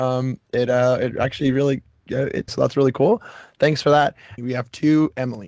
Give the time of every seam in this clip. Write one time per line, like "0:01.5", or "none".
0:02.5
0:04.4